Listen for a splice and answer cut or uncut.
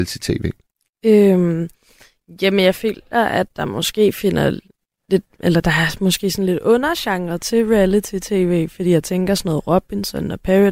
uncut